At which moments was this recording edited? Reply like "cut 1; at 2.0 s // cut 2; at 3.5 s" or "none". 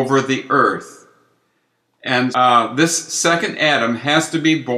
cut 1; at 2.3 s